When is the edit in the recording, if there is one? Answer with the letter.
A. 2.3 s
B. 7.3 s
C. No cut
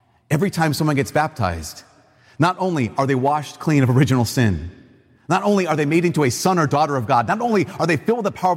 C